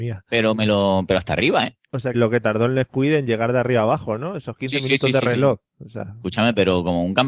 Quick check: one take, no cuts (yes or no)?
no